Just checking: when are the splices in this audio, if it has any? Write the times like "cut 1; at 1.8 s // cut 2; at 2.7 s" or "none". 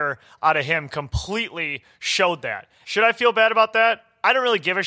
cut 1; at 2.8 s

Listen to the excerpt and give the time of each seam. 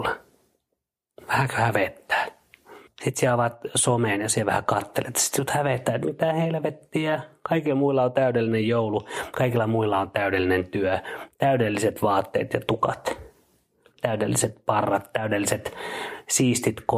cut 1; at 2.9 s

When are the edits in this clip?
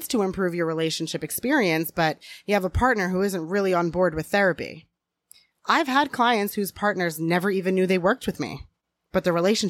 none

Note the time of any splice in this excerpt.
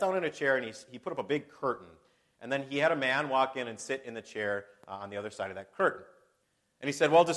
none

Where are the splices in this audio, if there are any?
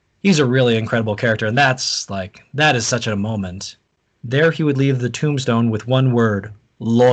cut 1; at 4.1 s

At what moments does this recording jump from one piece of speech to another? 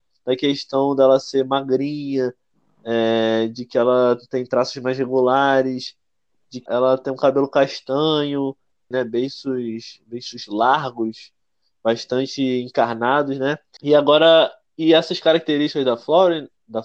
cut 1; at 6.7 s // cut 2; at 8.9 s // cut 3; at 13.8 s

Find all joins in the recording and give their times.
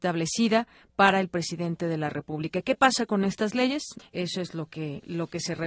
cut 1; at 4.0 s

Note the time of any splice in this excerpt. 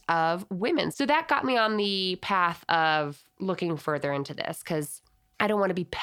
cut 1; at 0.9 s

